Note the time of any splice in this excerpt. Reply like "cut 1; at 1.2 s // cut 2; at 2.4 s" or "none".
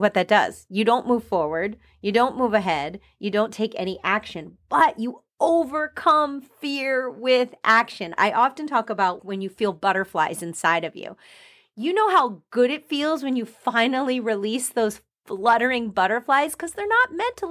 cut 1; at 8.2 s // cut 2; at 9.2 s